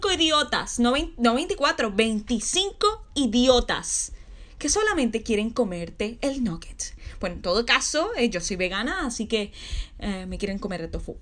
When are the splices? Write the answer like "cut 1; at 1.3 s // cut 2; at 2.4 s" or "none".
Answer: none